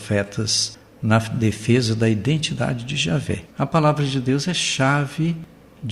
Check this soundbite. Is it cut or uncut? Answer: cut